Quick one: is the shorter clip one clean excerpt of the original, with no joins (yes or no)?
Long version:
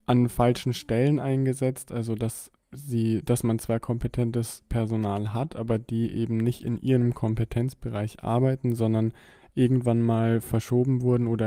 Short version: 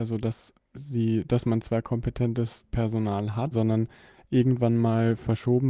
no